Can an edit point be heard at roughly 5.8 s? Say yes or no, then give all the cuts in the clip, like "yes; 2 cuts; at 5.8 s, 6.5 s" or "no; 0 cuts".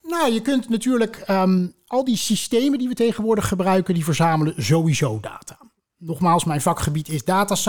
yes; 1 cut; at 5.8 s